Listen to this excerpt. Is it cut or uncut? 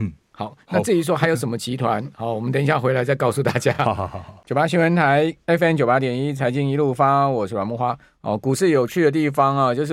uncut